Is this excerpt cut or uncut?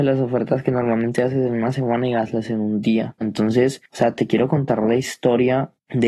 cut